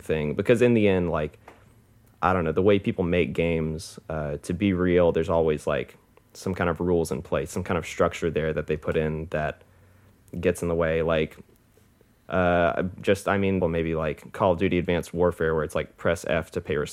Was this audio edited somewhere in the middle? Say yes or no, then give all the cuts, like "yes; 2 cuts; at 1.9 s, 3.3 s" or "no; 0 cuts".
yes; 1 cut; at 13.6 s